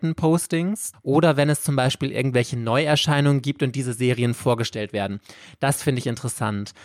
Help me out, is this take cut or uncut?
cut